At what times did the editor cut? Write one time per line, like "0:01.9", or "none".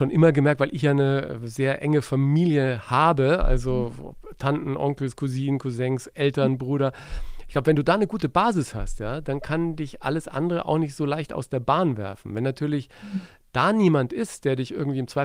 none

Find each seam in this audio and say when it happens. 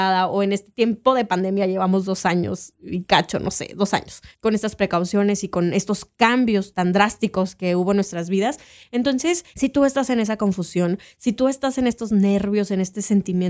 0:04.3
0:06.7

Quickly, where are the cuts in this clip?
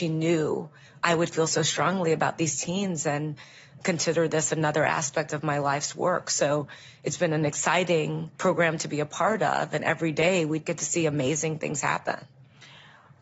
none

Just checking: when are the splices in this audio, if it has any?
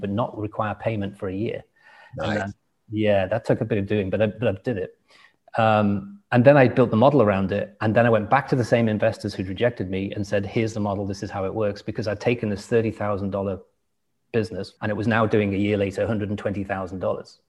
0:14.8

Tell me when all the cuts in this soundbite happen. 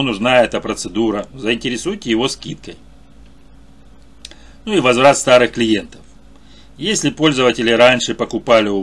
none

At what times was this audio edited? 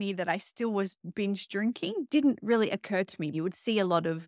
0:03.3

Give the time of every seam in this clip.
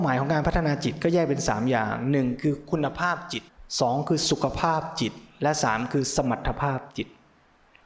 0:03.5

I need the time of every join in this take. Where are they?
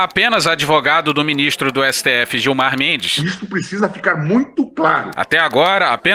0:05.1

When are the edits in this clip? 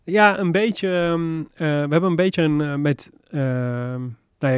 none

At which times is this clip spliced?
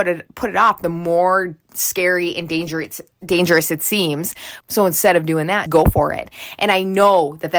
0:04.6
0:05.7

